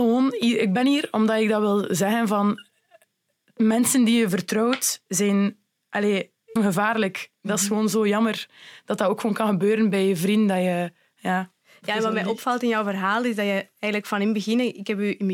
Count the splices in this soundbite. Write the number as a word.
one